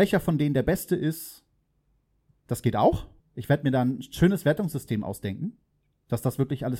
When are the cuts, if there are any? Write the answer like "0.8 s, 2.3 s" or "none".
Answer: 3.2 s